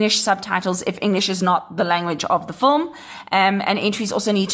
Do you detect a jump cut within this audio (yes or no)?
no